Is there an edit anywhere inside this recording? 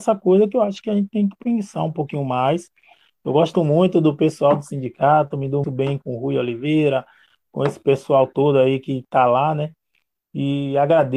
yes; 1 cut; at 5.6 s

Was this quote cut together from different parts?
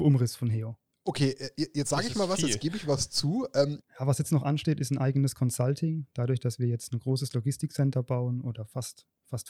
yes; 1 cut; at 3.8 s

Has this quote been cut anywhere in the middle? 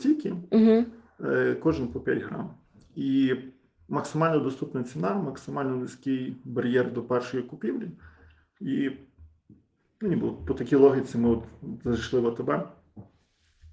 no; 0 cuts

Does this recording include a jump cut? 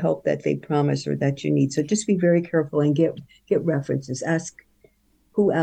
no; 0 cuts

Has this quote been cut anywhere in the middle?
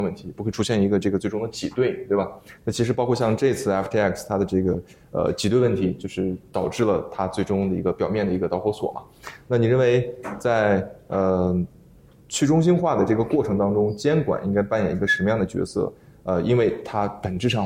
no; 0 cuts

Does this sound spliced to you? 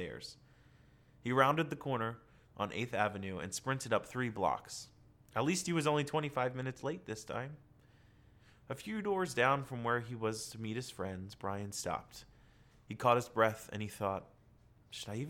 no; 0 cuts

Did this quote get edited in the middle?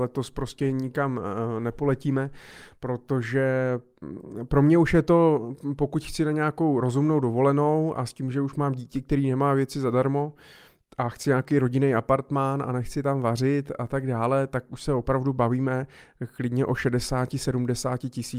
no; 0 cuts

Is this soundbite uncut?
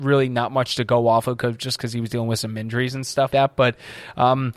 no; 1 cut; at 3.3 s

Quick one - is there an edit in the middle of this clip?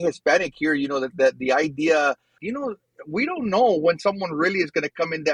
yes; 1 cut; at 2.4 s

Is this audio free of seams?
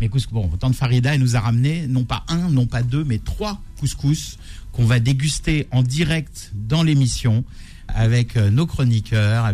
no; 1 cut; at 7.9 s

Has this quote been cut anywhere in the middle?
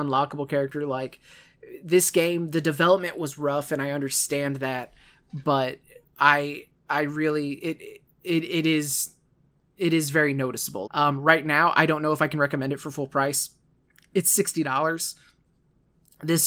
yes; 1 cut; at 10.9 s

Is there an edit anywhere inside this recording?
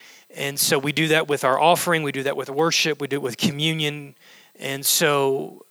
yes; 1 cut; at 4.5 s

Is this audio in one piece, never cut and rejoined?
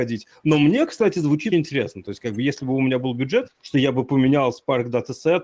no; 2 cuts; at 1.5 s, 3.5 s

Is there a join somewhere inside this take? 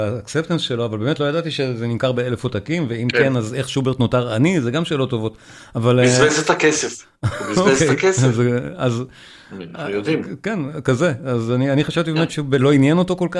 no; 0 cuts

